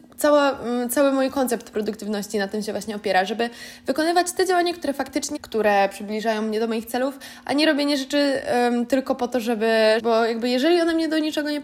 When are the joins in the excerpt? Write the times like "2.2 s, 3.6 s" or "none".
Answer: 5.4 s, 10.0 s